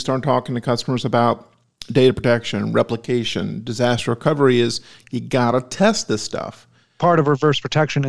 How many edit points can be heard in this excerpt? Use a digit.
1